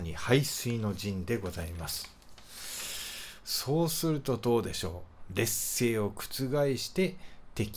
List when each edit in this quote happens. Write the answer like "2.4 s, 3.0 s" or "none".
3.4 s